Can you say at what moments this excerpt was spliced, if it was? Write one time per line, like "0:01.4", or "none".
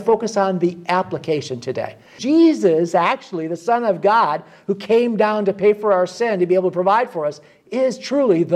0:02.2